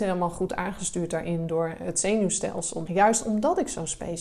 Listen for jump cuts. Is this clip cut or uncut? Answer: cut